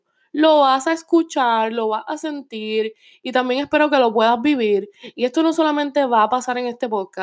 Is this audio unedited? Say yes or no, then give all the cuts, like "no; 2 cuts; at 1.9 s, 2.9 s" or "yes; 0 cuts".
yes; 0 cuts